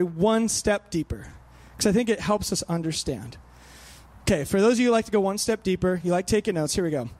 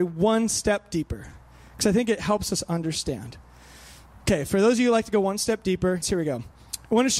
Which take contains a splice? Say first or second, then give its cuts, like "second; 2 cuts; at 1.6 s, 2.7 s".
second; 1 cut; at 6.0 s